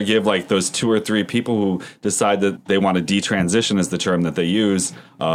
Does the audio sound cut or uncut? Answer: cut